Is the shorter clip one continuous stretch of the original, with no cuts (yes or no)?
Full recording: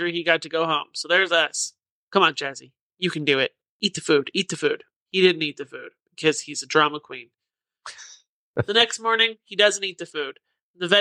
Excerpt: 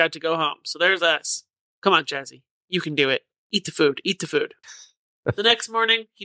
no